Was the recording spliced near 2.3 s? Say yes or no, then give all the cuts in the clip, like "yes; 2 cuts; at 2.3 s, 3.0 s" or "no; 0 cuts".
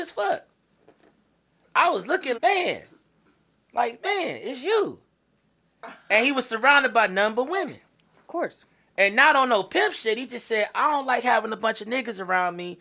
yes; 1 cut; at 2.3 s